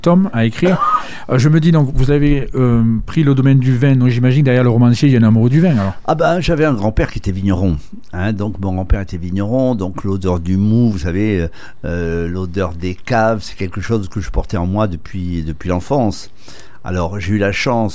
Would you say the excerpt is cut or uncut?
uncut